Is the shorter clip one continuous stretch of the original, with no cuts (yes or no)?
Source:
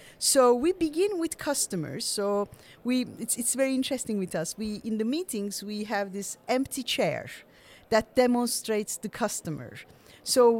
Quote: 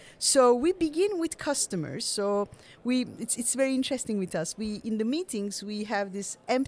yes